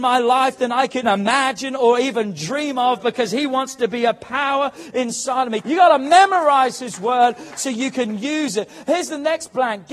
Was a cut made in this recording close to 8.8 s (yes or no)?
no